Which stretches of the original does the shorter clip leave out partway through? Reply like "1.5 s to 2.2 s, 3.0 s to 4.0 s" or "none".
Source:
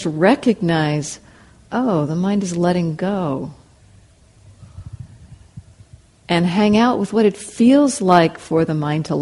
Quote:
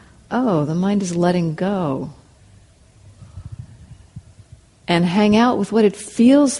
none